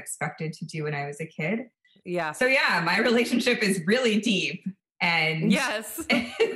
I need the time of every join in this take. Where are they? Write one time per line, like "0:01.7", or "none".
none